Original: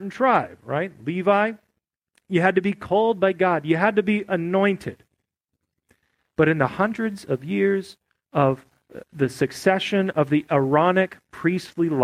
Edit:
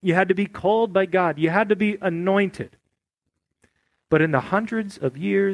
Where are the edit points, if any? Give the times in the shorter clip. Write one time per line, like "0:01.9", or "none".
none